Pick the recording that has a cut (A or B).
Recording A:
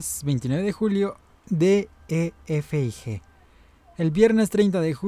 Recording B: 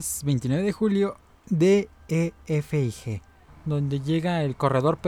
B